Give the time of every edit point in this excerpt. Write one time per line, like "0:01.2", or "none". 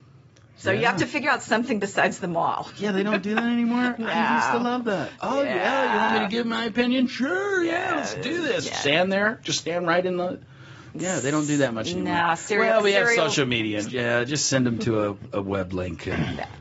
0:13.8

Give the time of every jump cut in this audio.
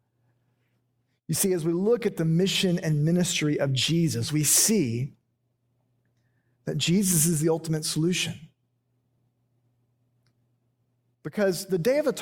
none

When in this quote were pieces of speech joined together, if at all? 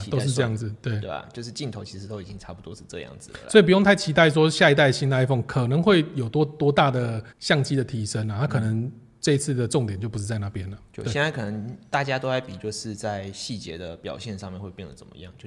0:07.3

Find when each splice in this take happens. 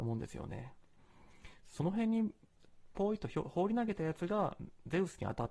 none

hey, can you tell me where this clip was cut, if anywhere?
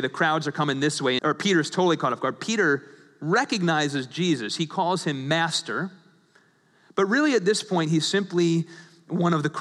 0:01.2

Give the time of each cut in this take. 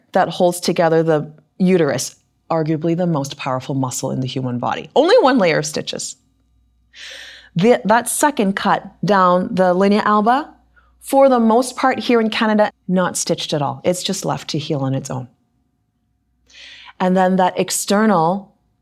0:12.7

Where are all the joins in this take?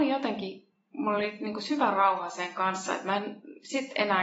none

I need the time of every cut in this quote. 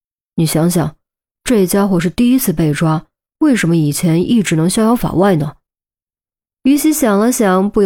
none

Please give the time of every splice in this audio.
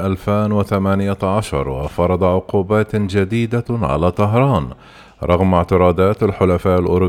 none

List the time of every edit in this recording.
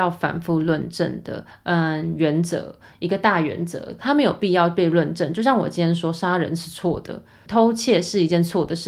0:01.5
0:04.0
0:07.5

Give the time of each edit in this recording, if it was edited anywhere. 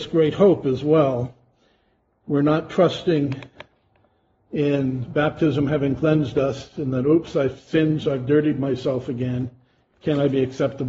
none

